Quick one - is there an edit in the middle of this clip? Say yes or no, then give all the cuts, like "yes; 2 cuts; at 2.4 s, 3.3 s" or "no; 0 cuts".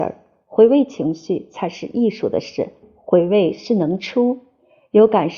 yes; 1 cut; at 2.8 s